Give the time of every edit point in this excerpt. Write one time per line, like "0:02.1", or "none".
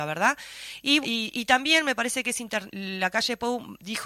0:01.0
0:02.7